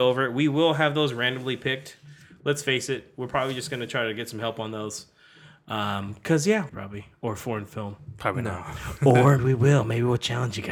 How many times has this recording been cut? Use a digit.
2